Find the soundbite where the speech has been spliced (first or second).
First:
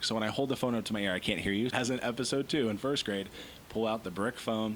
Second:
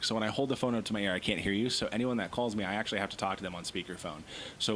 first